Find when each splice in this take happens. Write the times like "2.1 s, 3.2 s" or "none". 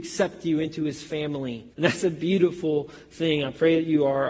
1.7 s